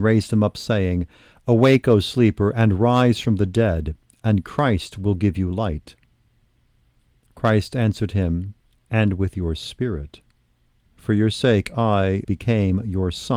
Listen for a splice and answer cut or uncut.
cut